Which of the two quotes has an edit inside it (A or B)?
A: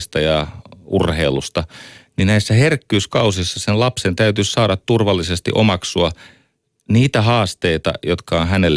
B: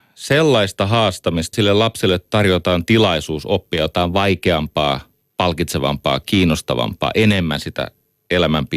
B